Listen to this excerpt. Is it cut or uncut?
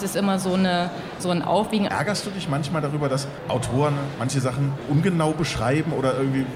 cut